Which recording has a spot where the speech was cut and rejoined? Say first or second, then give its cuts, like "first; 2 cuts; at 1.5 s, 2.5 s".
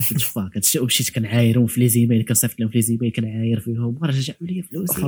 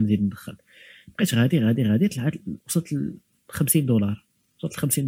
second; 1 cut; at 2.6 s